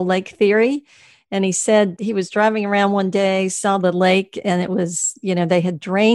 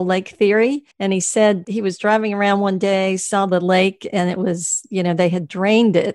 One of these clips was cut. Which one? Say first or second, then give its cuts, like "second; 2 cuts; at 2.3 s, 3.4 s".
second; 1 cut; at 0.9 s